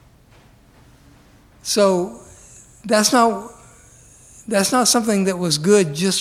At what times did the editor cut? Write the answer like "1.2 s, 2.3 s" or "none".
none